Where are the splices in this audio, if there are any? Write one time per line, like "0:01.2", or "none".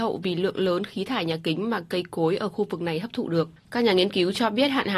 0:03.6